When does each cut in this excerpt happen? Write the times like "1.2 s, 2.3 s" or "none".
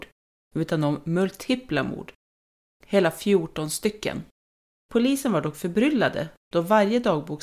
4.8 s